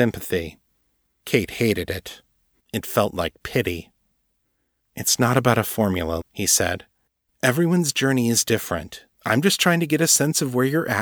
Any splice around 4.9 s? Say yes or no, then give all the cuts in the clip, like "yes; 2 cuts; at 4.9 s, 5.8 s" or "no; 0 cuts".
no; 2 cuts; at 6.2 s, 9.1 s